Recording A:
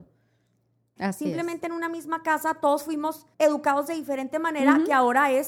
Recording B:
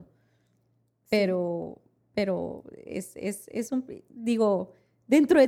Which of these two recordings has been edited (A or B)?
A